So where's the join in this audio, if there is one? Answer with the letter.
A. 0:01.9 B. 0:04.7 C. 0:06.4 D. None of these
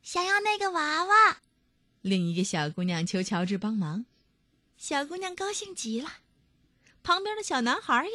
B